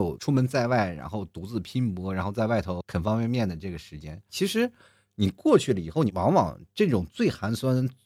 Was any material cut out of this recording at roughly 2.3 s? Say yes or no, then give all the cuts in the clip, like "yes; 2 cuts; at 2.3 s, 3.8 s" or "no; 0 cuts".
no; 2 cuts; at 4.3 s, 6.1 s